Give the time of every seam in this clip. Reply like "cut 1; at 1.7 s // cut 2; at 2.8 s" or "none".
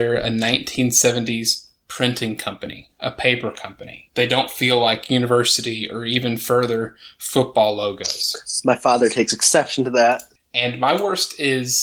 cut 1; at 4.1 s // cut 2; at 10.4 s